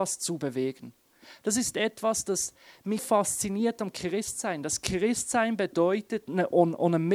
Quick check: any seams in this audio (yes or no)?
yes